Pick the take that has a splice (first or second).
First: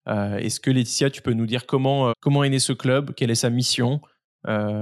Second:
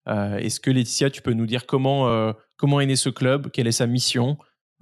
first